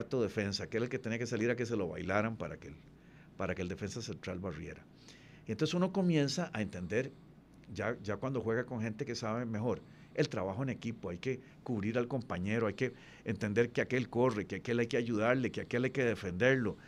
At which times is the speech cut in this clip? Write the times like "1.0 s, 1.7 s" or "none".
none